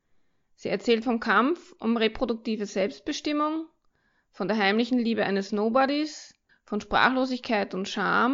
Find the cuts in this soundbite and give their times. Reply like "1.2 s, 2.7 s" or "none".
6.5 s

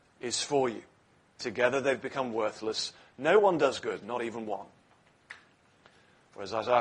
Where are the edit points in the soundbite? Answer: 1.4 s

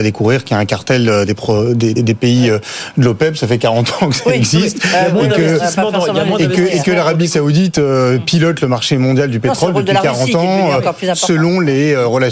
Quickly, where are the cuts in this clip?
2.0 s

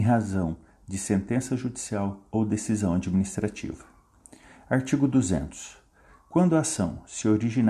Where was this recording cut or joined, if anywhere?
none

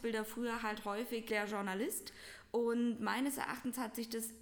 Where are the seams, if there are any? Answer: 1.3 s

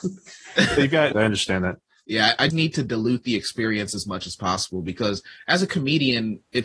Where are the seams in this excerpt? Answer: 1.1 s, 2.5 s

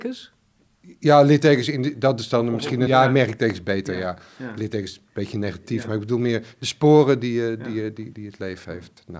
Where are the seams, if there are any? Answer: 2.9 s

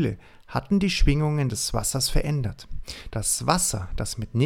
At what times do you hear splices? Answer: 3.1 s

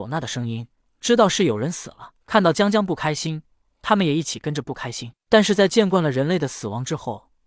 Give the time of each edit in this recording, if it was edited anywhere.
2.2 s

